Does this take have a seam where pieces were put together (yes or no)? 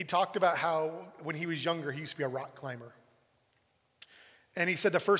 no